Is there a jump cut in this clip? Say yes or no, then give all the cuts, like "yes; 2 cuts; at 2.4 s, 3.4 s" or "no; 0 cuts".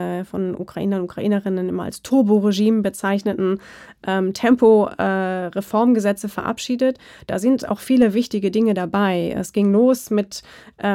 no; 0 cuts